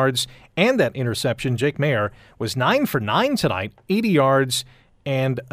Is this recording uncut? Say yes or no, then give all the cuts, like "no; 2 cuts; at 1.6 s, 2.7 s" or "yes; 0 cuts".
yes; 0 cuts